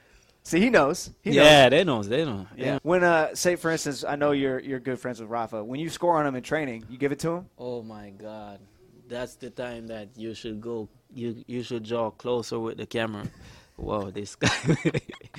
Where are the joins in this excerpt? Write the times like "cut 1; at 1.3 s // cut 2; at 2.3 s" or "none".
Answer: cut 1; at 2.8 s

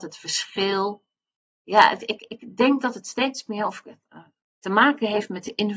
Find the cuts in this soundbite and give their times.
none

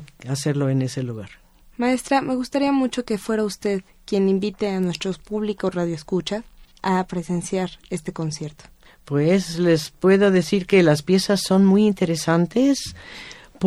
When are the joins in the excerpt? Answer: none

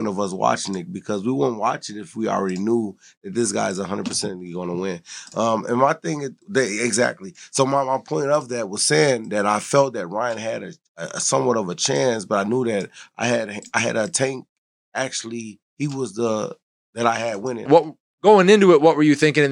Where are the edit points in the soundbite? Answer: cut 1; at 15.7 s // cut 2; at 17.7 s

